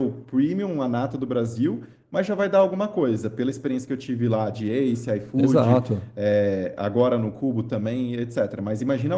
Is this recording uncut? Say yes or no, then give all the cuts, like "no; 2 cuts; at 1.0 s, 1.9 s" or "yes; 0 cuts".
yes; 0 cuts